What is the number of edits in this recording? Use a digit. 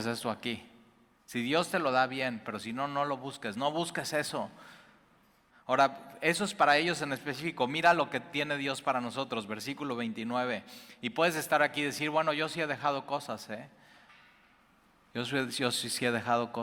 1